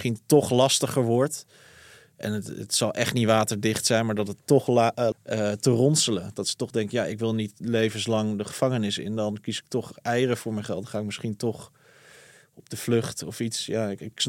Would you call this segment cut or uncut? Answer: cut